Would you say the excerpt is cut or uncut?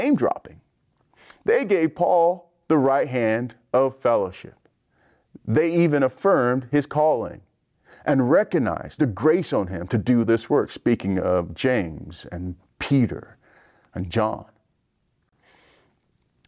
uncut